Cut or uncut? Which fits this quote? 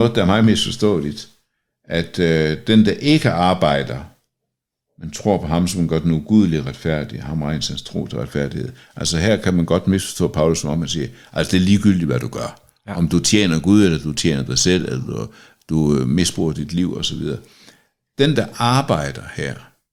uncut